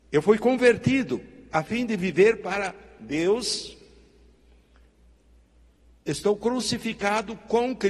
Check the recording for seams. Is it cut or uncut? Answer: uncut